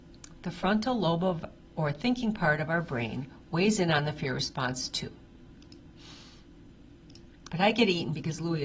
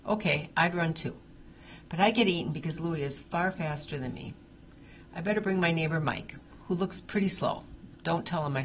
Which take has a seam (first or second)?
first